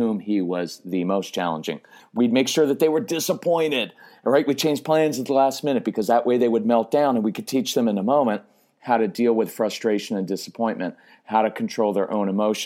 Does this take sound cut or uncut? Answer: cut